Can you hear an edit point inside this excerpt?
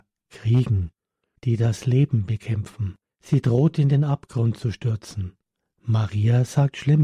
yes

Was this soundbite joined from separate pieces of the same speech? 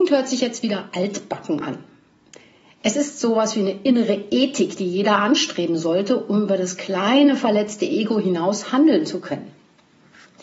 no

